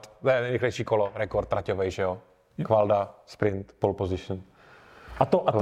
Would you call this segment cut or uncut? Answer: uncut